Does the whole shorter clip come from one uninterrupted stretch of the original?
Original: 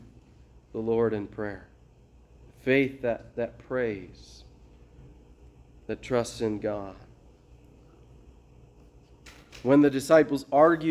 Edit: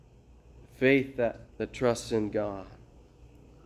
no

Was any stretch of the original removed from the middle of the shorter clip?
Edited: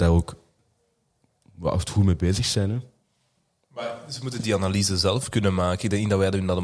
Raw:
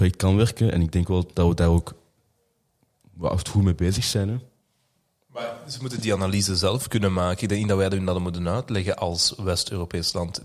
no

